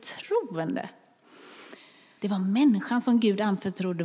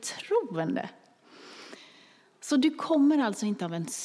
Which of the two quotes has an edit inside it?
first; 1 cut; at 2.2 s

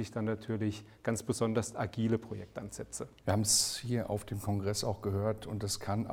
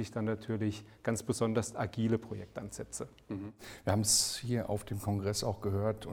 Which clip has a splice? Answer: first; 1 cut; at 3.2 s

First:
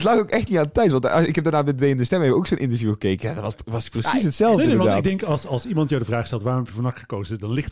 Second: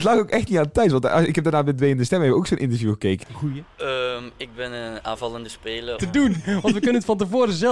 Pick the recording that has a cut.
second; 2 cuts; at 3.2 s, 6.0 s

